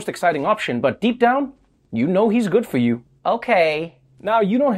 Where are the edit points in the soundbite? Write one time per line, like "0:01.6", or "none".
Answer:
0:03.1